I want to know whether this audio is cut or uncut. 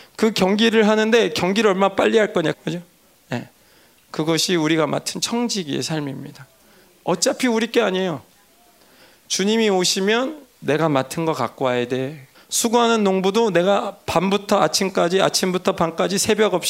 cut